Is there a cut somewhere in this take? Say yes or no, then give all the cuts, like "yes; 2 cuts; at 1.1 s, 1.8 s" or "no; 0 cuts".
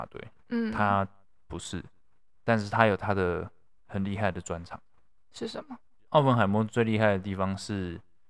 no; 0 cuts